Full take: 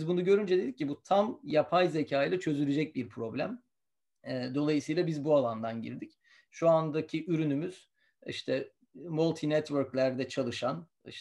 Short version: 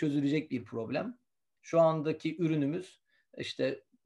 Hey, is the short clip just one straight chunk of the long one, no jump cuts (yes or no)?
no